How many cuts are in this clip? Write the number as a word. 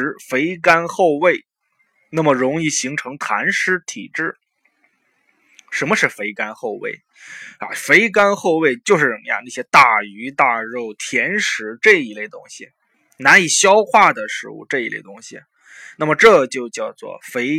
zero